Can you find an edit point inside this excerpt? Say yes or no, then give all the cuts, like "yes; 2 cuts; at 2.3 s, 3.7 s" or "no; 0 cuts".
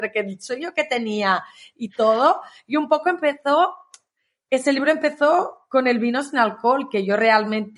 no; 0 cuts